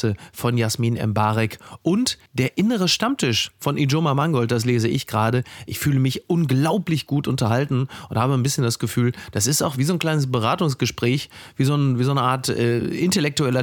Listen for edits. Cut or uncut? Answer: cut